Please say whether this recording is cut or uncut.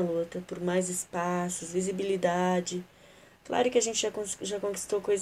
uncut